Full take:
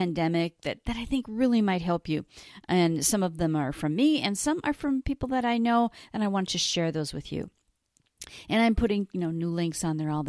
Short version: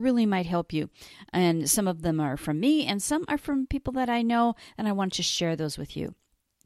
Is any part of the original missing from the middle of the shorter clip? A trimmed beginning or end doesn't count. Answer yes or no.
no